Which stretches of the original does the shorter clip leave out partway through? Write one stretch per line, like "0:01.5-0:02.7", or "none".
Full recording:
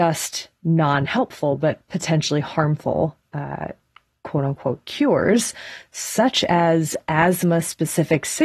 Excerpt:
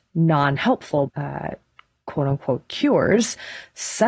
0:01.6-0:03.3